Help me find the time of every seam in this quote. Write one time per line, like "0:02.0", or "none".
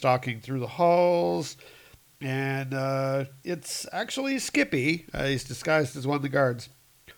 none